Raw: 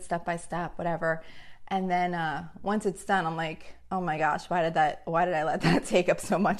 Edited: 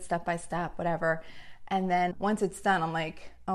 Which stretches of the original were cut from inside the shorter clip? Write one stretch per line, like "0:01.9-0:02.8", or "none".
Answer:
0:02.1-0:02.5